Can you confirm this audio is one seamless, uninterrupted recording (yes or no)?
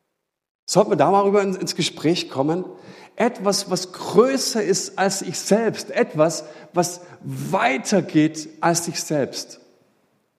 yes